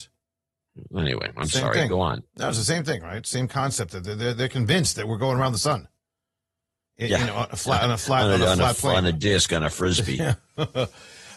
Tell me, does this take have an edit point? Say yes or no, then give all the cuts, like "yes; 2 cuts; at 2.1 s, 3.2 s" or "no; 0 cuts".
no; 0 cuts